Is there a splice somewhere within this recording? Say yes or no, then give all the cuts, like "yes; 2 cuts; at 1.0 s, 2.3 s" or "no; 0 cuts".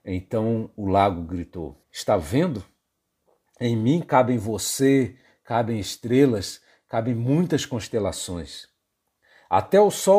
yes; 1 cut; at 1.8 s